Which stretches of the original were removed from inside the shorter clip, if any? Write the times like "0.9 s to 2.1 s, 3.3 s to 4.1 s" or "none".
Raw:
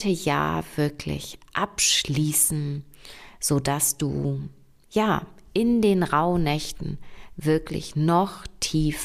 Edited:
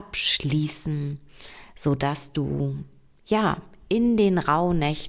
none